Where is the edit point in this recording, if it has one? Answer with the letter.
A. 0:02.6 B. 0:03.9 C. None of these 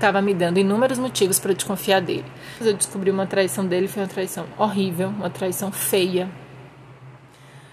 A